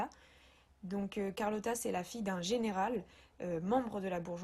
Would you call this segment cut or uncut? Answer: uncut